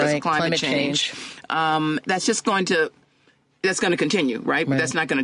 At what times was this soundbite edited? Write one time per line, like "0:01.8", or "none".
0:02.0